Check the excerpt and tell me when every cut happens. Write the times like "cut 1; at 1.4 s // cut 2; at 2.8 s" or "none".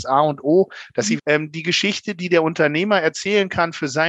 cut 1; at 1.2 s